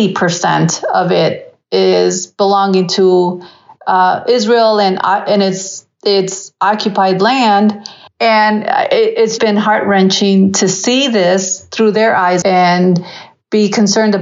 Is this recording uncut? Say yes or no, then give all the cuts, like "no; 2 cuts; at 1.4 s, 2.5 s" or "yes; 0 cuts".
no; 3 cuts; at 8.1 s, 9.4 s, 12.4 s